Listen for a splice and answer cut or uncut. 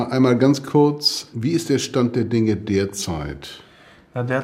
cut